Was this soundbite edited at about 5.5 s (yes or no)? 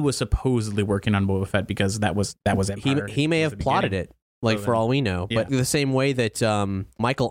yes